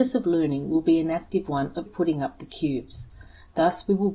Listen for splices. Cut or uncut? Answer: cut